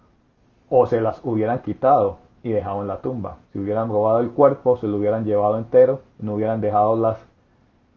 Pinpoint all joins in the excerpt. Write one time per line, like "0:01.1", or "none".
0:03.4